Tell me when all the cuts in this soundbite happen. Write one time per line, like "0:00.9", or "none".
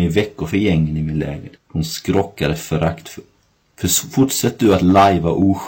0:01.5